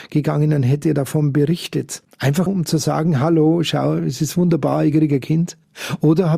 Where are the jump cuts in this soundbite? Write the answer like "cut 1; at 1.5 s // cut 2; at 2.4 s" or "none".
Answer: cut 1; at 2.5 s